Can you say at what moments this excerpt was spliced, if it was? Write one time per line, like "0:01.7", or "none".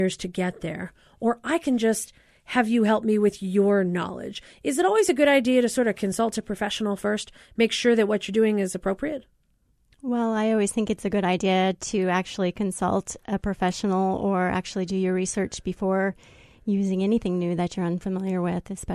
none